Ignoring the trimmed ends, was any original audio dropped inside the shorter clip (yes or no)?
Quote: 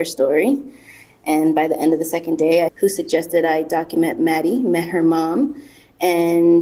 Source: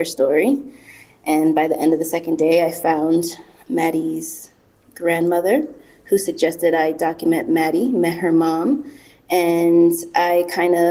yes